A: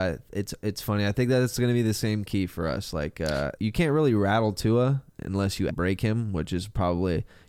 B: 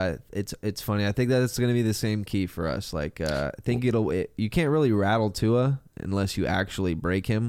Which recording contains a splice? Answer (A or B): A